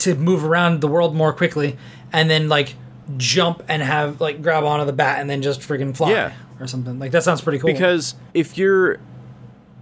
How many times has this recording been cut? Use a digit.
1